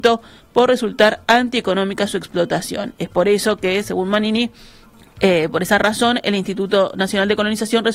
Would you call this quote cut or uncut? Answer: uncut